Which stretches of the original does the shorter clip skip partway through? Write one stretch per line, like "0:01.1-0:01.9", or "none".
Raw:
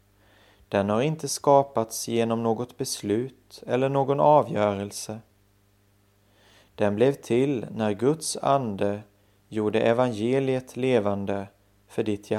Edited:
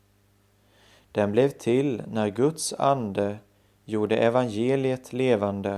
none